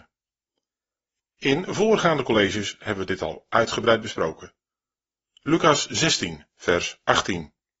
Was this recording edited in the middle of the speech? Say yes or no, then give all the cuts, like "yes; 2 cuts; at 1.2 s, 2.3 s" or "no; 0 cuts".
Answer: no; 0 cuts